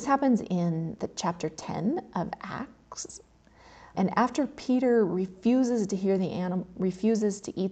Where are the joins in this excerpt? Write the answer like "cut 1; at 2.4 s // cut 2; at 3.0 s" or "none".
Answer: cut 1; at 3.9 s

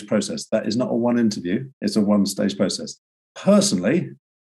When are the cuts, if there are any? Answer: cut 1; at 1.7 s

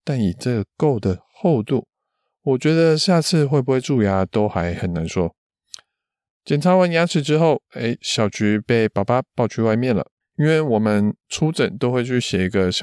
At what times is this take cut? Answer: cut 1; at 10.2 s

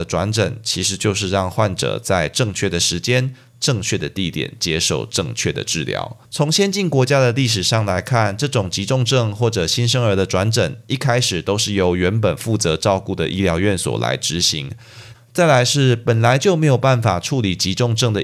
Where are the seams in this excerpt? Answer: cut 1; at 6.2 s // cut 2; at 15.1 s

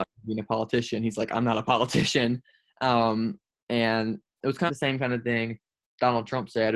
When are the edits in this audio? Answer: cut 1; at 4.7 s

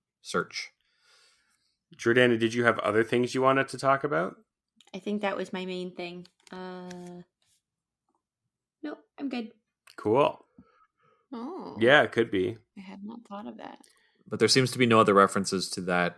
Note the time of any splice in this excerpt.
cut 1; at 11.2 s

